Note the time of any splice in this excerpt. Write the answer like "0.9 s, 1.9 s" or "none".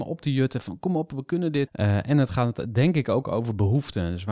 1.7 s